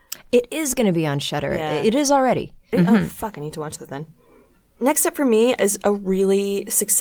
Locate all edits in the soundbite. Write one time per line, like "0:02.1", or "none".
0:02.7